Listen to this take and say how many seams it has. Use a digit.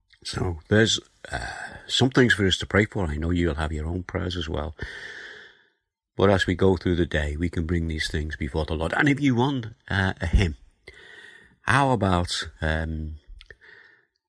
0